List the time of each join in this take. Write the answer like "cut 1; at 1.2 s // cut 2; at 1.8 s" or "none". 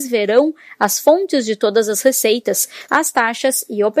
cut 1; at 2.9 s

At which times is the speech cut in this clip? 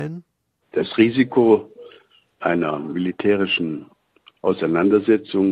none

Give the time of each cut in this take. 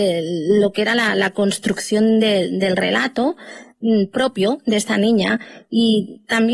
none

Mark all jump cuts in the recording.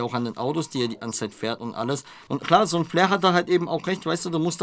cut 1; at 2.3 s

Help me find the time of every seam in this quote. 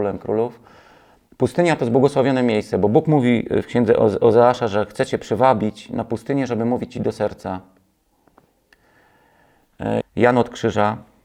cut 1; at 10.0 s

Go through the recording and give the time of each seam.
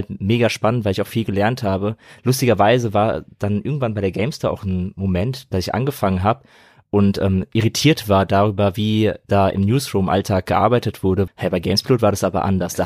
cut 1; at 11.3 s

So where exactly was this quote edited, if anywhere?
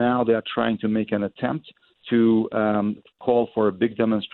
cut 1; at 3.0 s

